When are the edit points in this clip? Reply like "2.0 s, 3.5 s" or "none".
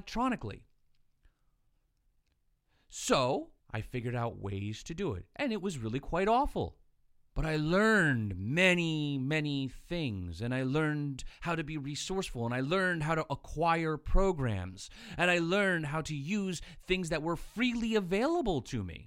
3.6 s, 7.3 s